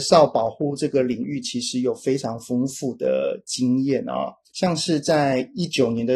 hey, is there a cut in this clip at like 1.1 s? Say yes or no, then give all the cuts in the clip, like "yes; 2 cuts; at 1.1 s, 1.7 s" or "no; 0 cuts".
no; 1 cut; at 4.5 s